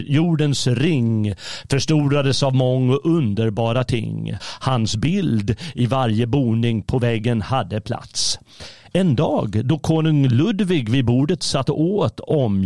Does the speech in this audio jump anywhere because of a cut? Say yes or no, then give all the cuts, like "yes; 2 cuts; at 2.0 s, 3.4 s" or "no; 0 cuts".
yes; 1 cut; at 4.4 s